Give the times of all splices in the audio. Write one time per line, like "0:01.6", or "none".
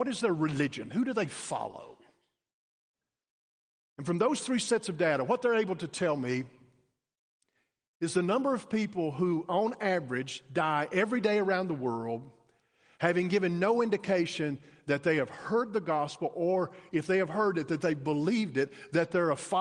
none